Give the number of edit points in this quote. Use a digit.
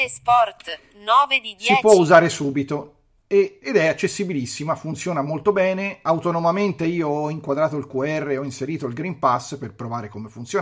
1